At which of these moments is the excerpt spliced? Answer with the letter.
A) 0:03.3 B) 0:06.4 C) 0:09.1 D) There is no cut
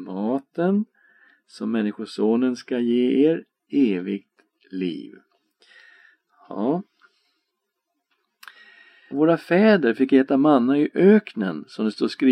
C